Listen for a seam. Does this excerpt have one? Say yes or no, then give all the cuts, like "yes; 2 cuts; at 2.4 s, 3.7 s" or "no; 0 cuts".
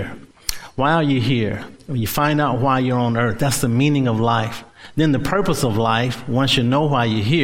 no; 0 cuts